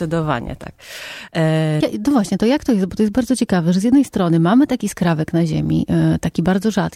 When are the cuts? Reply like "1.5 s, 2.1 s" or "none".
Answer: 1.8 s